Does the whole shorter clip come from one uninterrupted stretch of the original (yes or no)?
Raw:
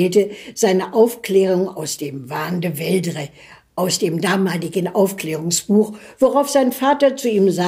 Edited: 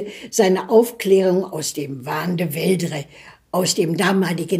yes